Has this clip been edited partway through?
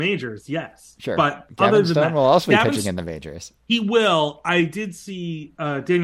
no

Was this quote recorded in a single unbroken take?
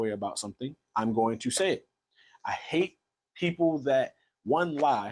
yes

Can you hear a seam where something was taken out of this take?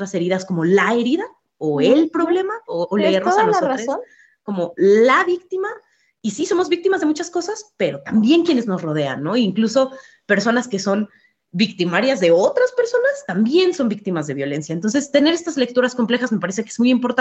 no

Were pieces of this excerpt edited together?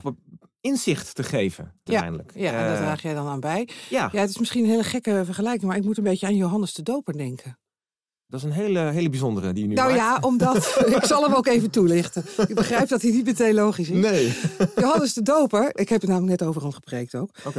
yes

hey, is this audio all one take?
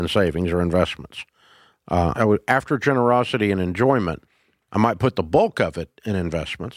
no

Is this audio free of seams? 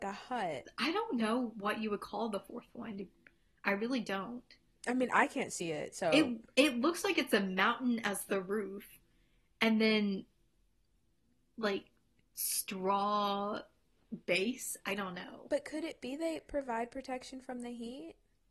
yes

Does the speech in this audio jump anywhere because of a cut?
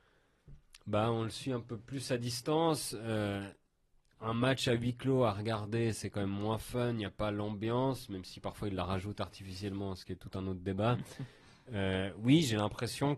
no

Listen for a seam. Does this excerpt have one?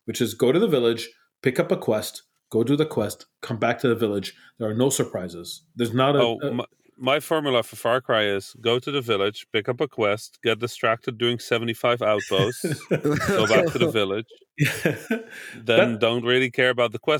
no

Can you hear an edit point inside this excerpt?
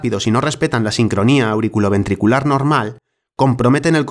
no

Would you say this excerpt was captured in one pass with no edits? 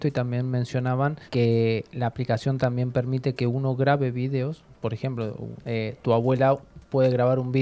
no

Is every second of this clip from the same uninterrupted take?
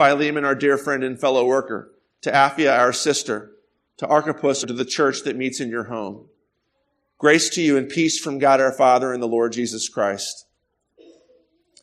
no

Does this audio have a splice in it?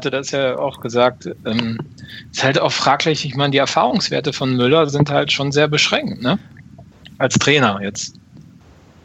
no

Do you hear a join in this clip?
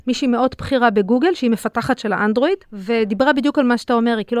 yes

